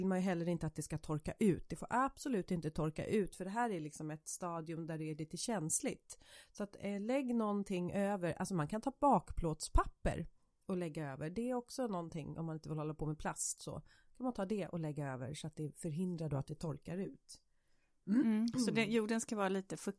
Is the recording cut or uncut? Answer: uncut